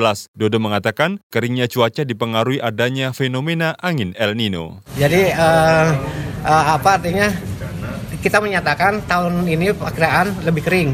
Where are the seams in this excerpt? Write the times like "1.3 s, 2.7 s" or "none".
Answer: none